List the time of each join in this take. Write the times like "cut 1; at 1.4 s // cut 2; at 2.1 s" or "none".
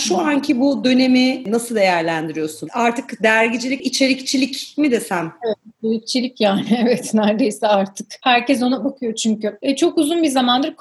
cut 1; at 3.8 s